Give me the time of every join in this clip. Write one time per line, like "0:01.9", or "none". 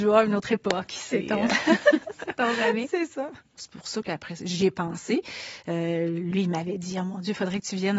0:03.5